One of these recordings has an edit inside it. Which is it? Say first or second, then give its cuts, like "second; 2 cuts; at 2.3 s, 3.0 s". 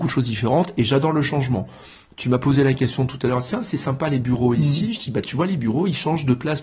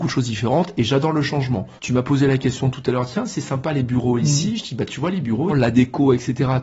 second; 2 cuts; at 1.8 s, 5.5 s